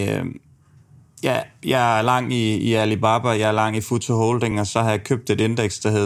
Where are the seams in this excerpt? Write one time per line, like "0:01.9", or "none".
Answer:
none